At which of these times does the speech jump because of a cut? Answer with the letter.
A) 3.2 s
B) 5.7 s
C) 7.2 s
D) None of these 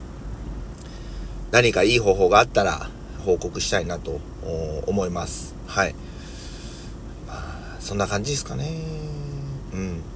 A